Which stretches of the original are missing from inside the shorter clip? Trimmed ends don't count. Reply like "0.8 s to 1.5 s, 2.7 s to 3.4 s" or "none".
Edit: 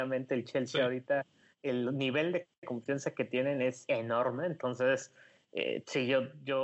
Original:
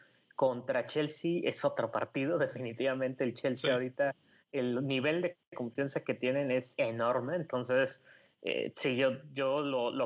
none